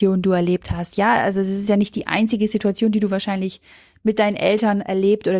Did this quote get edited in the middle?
no; 0 cuts

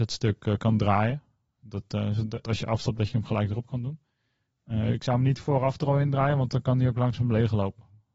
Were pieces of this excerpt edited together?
yes; 1 cut; at 2.4 s

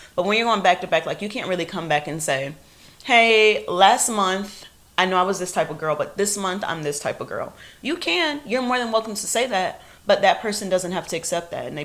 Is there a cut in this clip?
no; 0 cuts

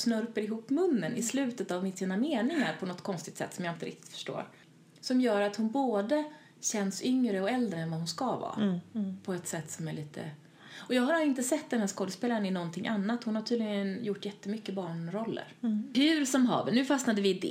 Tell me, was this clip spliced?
no; 0 cuts

